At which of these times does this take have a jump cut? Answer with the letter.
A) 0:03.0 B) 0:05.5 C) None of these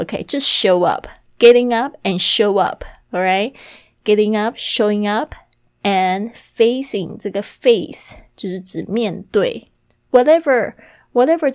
C